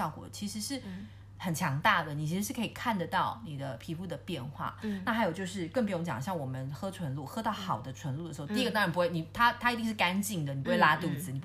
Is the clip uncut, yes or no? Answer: yes